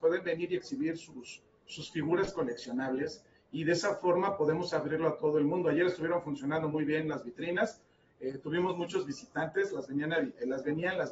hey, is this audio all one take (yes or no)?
yes